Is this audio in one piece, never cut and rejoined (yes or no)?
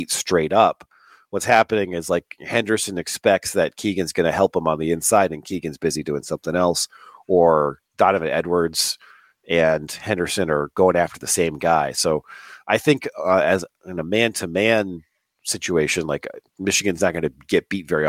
yes